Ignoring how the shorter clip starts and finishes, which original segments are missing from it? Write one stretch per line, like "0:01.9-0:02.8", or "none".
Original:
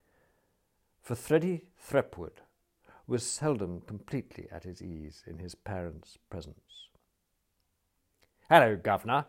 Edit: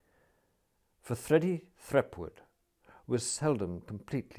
none